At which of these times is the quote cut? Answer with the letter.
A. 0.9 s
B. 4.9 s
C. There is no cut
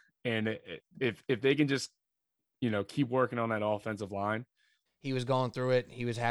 B